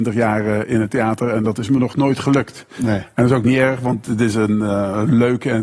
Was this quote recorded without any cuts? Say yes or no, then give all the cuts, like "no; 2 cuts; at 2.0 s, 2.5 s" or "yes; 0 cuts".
yes; 0 cuts